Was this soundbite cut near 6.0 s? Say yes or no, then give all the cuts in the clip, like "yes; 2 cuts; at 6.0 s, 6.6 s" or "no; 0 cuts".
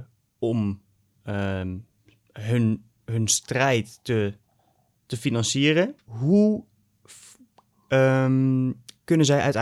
yes; 1 cut; at 6.0 s